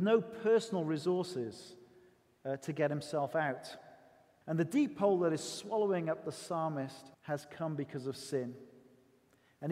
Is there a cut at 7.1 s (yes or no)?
yes